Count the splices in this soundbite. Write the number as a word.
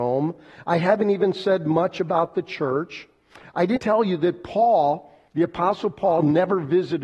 two